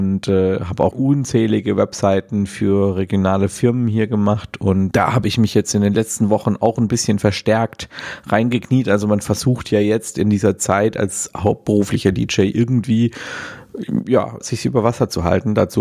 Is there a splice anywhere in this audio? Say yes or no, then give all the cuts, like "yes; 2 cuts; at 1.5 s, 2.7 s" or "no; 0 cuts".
yes; 3 cuts; at 0.9 s, 4.9 s, 14.4 s